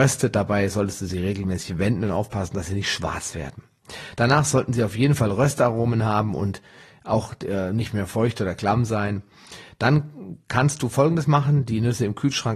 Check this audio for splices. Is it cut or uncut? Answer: uncut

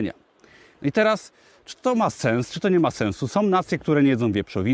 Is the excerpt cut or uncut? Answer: uncut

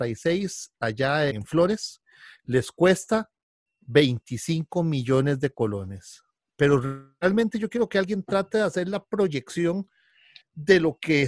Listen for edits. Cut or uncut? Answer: cut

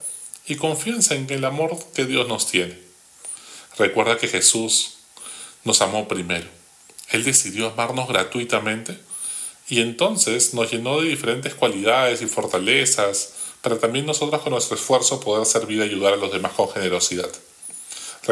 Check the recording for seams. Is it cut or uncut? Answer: uncut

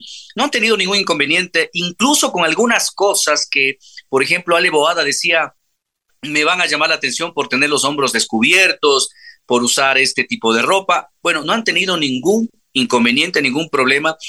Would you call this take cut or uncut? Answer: uncut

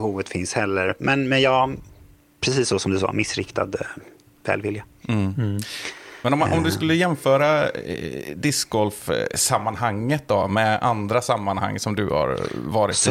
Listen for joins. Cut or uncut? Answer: uncut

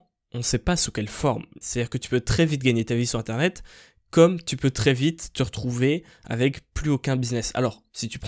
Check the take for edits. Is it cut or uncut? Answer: cut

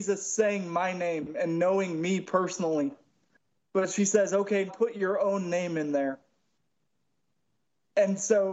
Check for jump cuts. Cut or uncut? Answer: cut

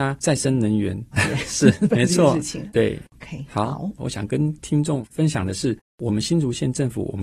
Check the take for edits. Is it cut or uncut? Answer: cut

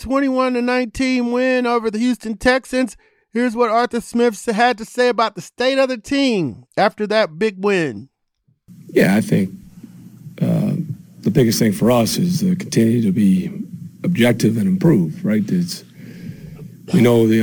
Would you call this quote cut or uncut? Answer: uncut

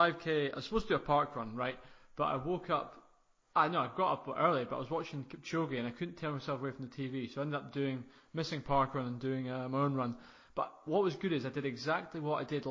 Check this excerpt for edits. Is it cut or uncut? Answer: uncut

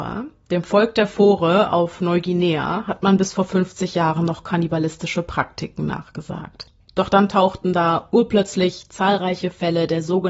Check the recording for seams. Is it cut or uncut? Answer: uncut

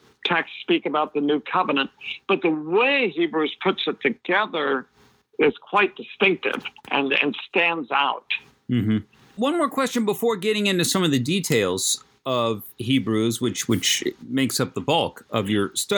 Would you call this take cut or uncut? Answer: uncut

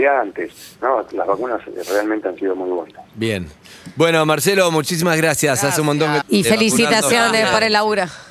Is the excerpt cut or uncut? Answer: cut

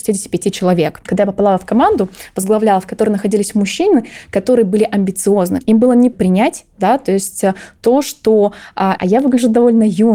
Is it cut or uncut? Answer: cut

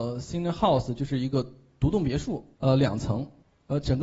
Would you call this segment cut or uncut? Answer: cut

